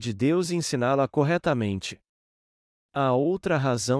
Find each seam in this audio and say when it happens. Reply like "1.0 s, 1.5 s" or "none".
none